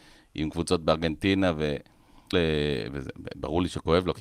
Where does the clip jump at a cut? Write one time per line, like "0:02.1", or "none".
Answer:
0:02.3